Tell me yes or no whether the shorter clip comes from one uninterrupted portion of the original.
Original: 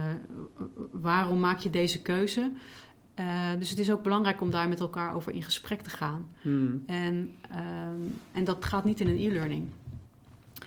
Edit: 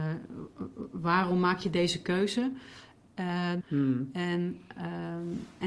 no